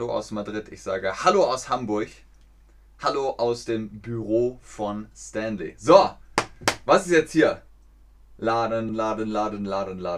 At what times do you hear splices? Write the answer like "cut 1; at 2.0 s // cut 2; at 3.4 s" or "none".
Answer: cut 1; at 8.9 s